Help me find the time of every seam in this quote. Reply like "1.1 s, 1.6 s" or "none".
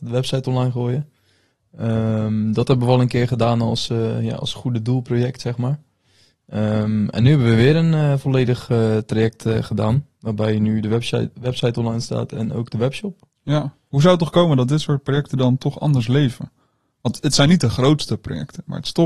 none